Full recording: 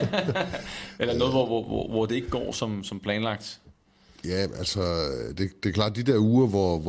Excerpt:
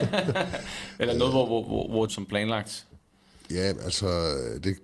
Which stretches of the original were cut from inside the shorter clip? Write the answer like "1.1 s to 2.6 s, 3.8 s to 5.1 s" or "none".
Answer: 2.1 s to 2.8 s